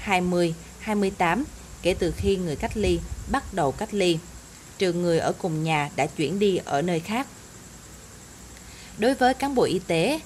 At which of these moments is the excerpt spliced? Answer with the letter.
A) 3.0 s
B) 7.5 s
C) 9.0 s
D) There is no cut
D